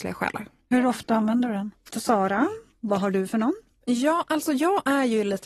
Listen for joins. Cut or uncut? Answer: cut